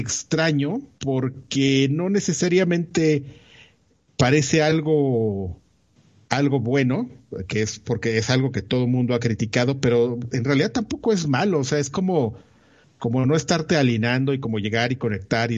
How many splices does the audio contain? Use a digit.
1